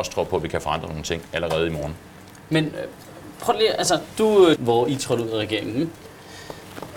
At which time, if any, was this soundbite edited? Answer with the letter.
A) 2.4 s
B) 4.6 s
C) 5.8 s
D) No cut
B